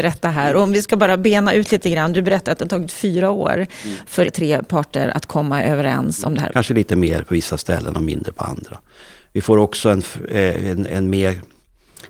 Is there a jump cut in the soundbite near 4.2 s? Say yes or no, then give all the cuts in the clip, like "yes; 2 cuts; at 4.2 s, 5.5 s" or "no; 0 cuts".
yes; 2 cuts; at 4.2 s, 6.5 s